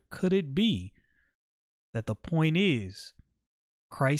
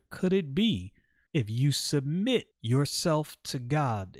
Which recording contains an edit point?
second; 2 cuts; at 1.3 s, 2.5 s

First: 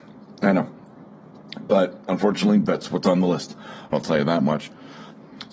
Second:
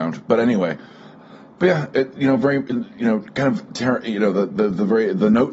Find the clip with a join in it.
first; 1 cut; at 3.9 s

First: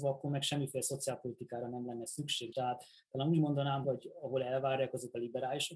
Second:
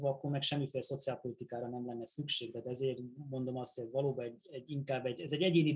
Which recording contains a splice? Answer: first; 2 cuts; at 2.5 s, 3.8 s

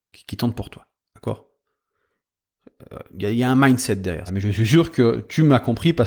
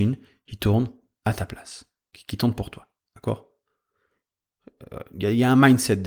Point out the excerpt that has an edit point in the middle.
first; 1 cut; at 4.3 s

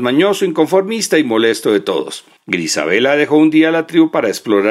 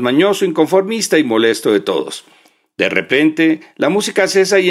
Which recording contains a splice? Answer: first; 1 cut; at 2.4 s

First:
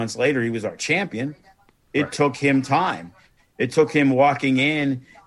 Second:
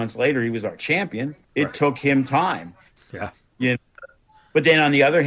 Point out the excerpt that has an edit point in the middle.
second; 2 cuts; at 1.4 s, 3.0 s

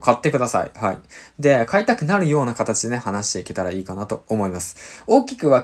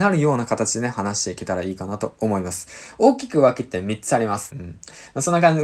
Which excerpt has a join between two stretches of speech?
second; 1 cut; at 4.5 s

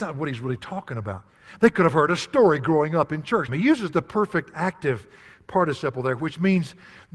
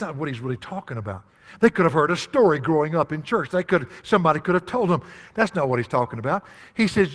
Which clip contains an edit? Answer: first; 1 cut; at 3.5 s

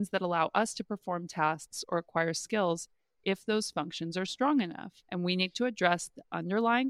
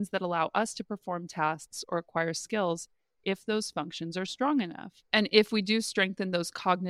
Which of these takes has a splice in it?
second; 1 cut; at 5.0 s

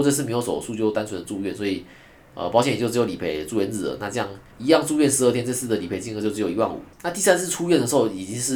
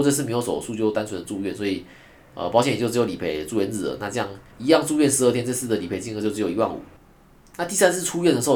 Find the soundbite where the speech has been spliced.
first; 1 cut; at 6.9 s

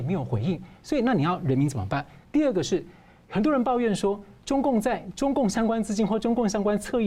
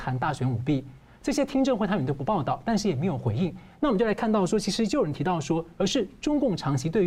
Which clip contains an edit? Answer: second; 2 cuts; at 3.7 s, 5.8 s

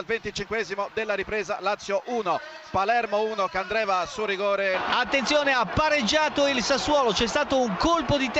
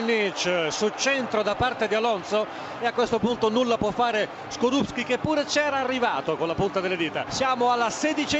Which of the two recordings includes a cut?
second; 1 cut; at 7.3 s

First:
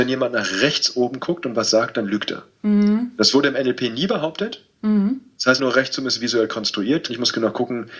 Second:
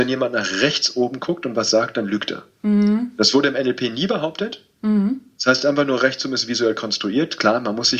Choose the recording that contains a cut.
first; 2 cuts; at 5.6 s, 7.1 s

